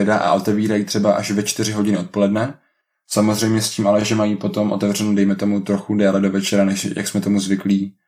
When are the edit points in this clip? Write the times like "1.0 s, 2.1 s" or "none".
none